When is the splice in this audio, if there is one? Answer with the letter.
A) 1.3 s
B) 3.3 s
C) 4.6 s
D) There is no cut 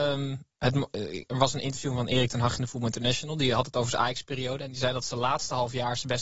D